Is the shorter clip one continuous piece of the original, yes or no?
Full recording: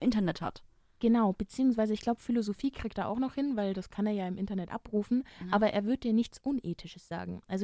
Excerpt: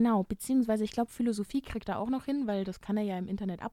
yes